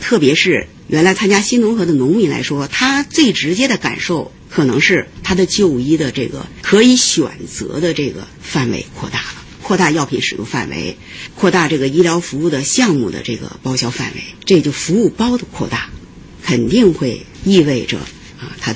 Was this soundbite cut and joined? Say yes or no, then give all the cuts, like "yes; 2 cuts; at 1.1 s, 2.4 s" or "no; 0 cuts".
no; 0 cuts